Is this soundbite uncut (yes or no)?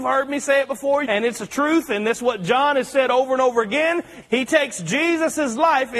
no